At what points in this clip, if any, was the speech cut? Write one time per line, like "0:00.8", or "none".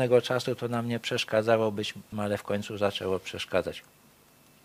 0:02.1